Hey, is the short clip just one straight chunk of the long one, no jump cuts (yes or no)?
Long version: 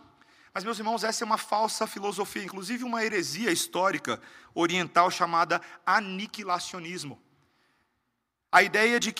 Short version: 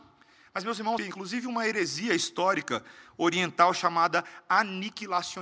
no